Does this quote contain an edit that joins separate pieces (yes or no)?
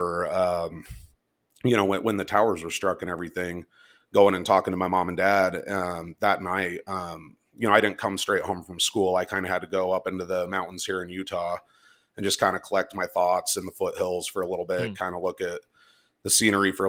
no